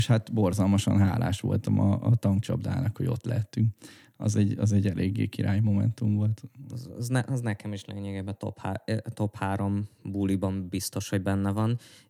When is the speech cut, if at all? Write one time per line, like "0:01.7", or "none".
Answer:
none